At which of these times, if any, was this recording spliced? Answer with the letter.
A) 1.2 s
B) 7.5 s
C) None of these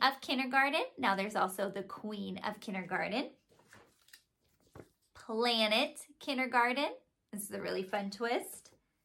C